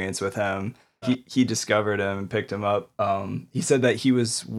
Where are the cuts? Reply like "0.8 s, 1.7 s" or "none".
1.0 s